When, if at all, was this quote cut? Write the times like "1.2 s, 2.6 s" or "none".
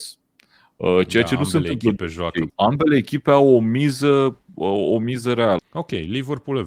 2.5 s, 5.6 s